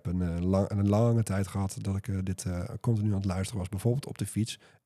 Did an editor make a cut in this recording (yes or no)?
no